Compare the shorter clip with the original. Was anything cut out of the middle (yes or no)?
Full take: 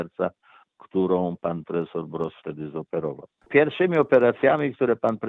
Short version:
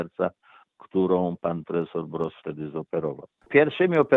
no